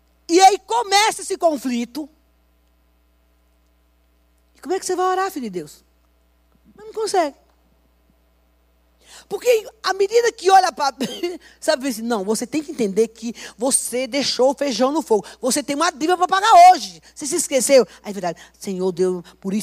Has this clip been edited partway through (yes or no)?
yes